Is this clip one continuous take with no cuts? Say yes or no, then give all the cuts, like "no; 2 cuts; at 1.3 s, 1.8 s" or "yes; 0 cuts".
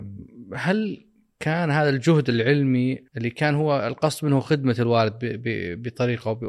no; 1 cut; at 3.1 s